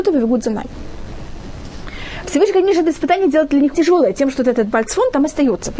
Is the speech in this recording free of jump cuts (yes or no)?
no